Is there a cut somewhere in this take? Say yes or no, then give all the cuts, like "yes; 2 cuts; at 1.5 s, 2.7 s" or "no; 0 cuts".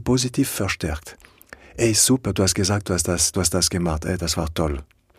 yes; 1 cut; at 3.3 s